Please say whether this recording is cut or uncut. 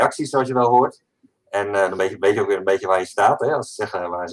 uncut